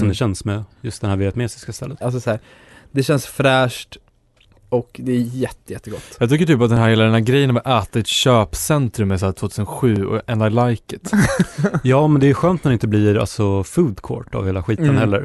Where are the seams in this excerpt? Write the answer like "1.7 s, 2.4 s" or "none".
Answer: 2.0 s